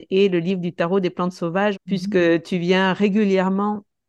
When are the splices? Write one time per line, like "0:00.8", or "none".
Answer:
0:01.7